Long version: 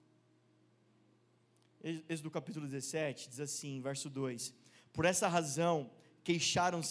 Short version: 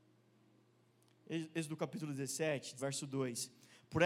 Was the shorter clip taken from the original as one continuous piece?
no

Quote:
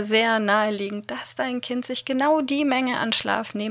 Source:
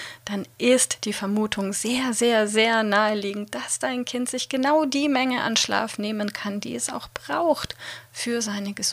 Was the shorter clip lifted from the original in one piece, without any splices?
yes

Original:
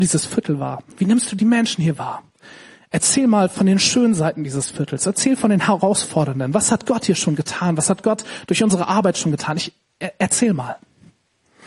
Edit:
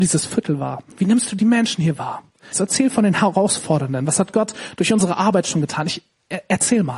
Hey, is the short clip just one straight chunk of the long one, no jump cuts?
no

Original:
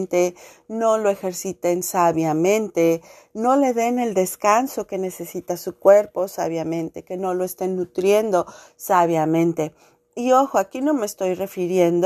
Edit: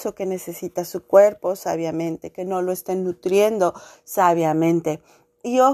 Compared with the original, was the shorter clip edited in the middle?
no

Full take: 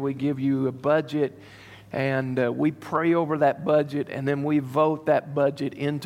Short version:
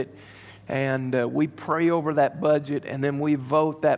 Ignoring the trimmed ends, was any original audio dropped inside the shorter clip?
no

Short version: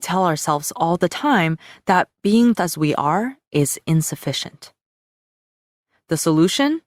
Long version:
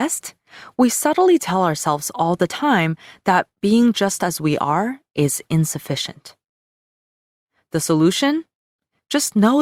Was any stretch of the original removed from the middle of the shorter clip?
yes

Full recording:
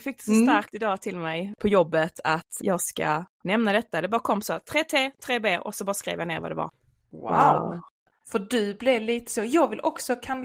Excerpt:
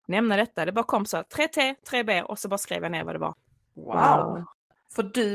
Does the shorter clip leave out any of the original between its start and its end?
no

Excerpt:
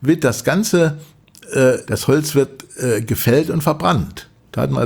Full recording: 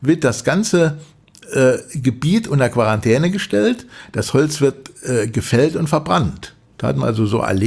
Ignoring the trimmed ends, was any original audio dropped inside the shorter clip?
yes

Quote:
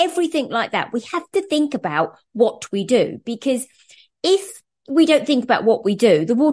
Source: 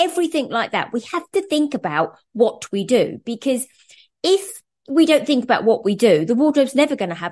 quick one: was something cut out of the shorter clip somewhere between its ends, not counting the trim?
no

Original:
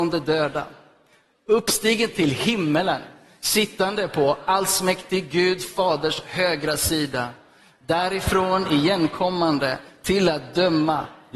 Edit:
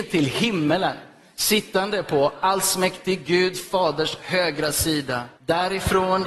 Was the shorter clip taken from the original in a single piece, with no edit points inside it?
no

